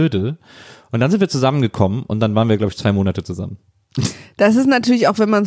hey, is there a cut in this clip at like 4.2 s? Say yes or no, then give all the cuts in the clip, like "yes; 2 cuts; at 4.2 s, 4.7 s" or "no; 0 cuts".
no; 0 cuts